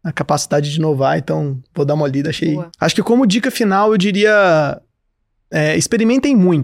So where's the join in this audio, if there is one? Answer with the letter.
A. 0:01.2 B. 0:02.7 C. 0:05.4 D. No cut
B